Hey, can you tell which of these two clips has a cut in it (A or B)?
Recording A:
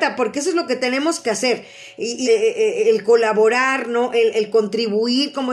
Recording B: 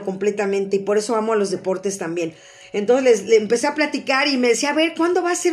A